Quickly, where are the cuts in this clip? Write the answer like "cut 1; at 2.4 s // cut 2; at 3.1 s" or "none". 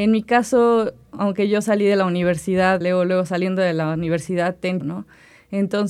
cut 1; at 2.8 s // cut 2; at 4.8 s